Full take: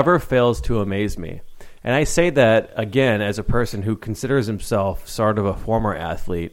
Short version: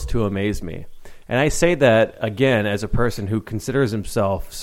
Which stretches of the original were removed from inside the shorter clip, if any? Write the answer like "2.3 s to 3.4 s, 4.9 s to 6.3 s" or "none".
none